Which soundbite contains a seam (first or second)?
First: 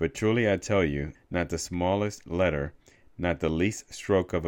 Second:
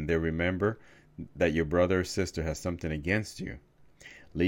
first